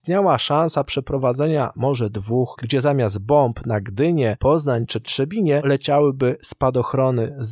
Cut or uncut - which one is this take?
cut